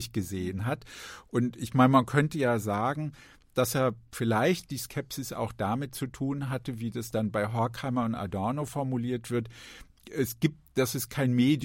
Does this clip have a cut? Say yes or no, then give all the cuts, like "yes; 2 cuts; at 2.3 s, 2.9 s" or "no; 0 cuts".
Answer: no; 0 cuts